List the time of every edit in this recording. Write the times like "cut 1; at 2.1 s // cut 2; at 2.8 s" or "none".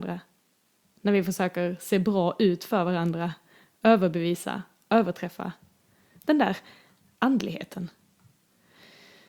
cut 1; at 6.2 s